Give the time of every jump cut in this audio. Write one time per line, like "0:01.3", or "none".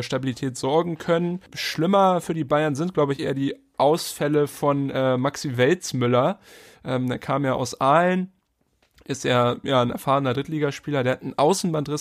none